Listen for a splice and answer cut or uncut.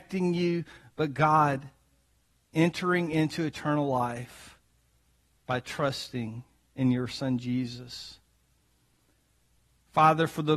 uncut